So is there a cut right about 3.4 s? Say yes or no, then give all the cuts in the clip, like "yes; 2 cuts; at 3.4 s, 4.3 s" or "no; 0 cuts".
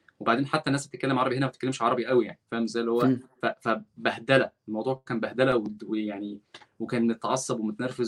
yes; 1 cut; at 3.4 s